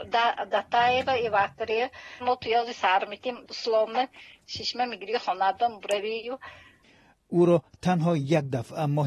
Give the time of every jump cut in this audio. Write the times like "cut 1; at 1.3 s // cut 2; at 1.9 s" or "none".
cut 1; at 2.2 s // cut 2; at 3.5 s